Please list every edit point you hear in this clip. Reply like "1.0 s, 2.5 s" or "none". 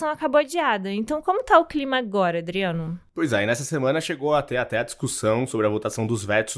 none